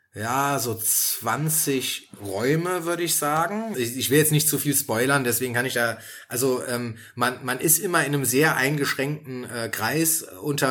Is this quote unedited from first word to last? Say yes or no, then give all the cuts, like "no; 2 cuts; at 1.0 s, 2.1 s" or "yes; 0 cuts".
no; 1 cut; at 3.7 s